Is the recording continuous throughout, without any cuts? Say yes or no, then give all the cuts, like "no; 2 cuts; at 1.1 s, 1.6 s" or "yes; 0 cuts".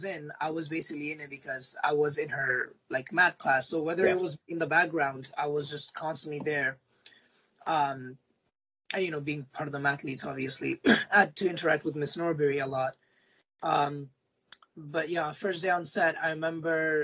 yes; 0 cuts